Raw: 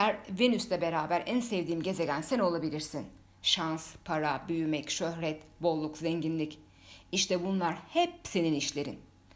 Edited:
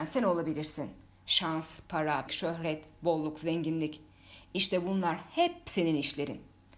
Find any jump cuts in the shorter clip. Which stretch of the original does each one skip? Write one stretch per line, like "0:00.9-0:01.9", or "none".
0:04.4-0:04.8